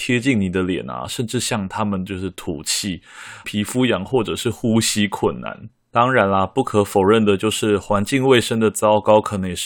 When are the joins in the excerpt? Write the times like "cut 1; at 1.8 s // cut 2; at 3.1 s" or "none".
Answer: cut 1; at 3.4 s